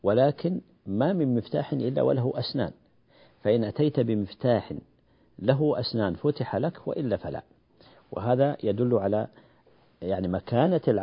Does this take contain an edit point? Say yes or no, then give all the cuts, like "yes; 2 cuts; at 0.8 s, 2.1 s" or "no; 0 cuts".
no; 0 cuts